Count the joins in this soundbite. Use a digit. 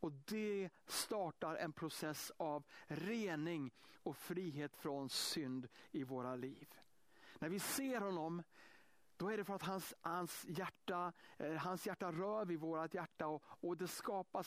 0